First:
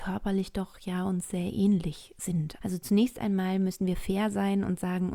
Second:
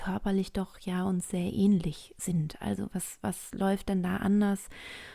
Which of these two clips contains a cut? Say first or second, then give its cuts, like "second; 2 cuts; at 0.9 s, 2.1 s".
first; 1 cut; at 2.6 s